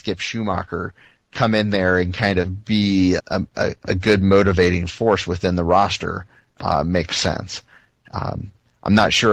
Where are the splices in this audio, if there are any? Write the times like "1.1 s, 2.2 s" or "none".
3.2 s